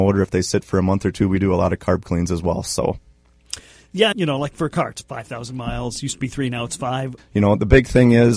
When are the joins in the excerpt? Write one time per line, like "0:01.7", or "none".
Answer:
0:04.1
0:07.2